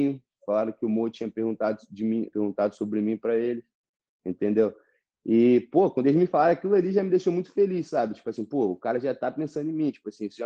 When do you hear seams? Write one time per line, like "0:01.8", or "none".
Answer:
0:02.3